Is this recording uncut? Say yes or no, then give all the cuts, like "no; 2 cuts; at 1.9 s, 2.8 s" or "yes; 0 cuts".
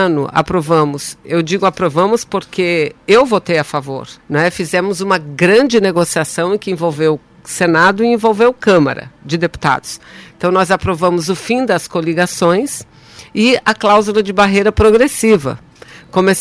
no; 1 cut; at 4.2 s